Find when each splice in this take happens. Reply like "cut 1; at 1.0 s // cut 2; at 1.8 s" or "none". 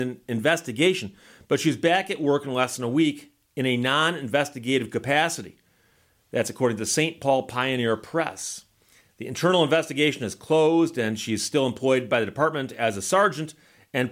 none